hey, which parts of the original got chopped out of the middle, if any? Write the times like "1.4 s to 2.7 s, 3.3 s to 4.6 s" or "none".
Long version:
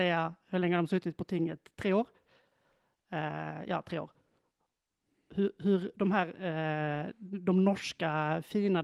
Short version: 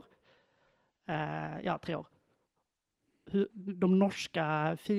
5.5 s to 7.1 s